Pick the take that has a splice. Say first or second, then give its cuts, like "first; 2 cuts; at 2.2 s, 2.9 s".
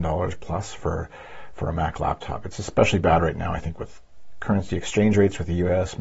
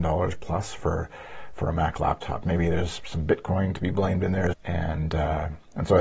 second; 2 cuts; at 2.4 s, 4.5 s